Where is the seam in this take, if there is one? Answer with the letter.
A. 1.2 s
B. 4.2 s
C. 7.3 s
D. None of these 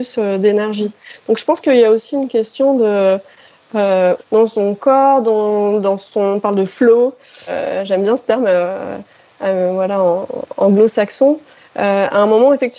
B